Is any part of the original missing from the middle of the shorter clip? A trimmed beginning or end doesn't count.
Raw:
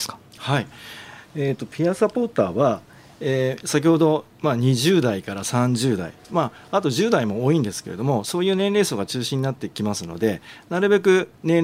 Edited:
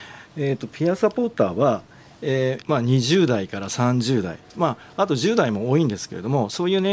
yes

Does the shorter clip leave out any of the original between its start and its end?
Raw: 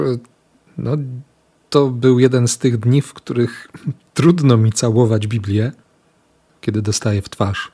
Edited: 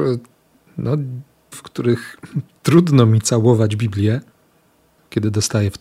yes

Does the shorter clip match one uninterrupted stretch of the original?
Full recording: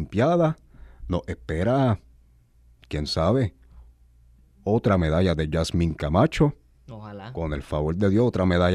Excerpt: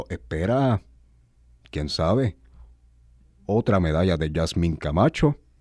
yes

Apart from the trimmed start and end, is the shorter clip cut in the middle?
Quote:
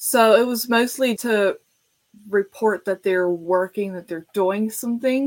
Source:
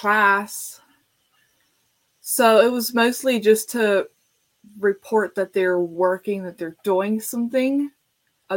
yes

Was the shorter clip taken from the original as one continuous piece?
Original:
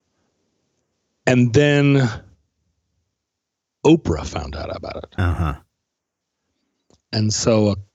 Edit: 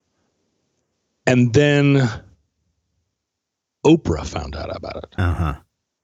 yes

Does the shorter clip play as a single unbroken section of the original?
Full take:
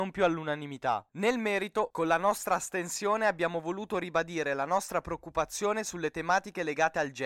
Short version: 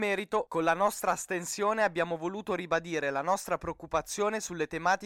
yes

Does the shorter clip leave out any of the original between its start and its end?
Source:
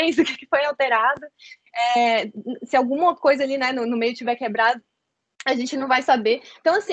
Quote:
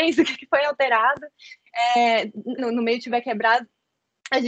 yes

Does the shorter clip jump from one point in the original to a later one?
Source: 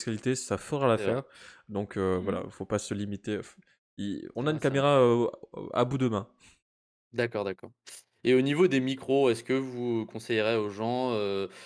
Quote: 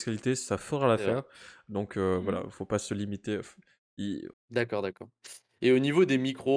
yes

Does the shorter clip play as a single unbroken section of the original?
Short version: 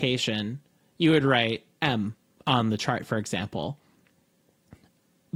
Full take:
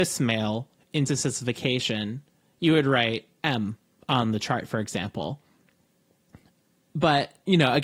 yes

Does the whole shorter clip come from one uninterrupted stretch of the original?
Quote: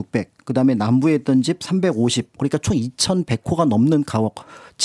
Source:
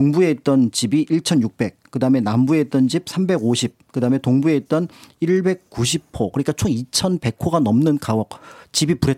no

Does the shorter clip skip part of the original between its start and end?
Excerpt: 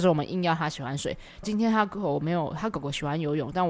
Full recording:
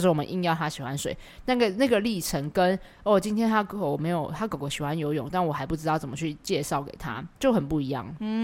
yes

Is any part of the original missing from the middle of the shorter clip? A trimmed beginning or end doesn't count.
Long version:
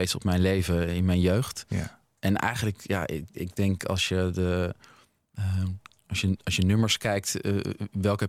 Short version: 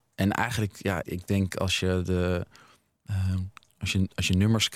yes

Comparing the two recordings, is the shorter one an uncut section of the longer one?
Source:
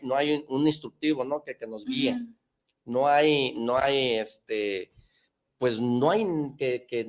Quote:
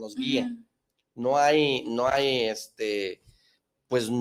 yes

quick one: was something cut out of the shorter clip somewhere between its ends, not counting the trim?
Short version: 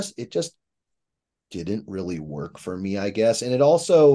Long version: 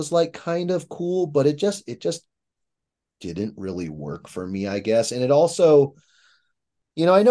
no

